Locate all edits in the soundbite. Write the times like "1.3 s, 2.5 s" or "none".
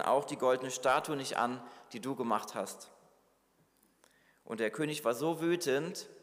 none